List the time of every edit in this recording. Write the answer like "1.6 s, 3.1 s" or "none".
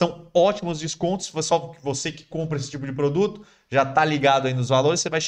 none